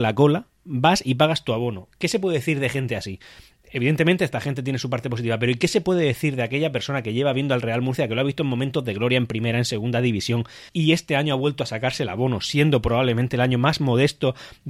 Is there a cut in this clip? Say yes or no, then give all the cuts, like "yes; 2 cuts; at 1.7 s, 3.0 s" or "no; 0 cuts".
yes; 1 cut; at 10.7 s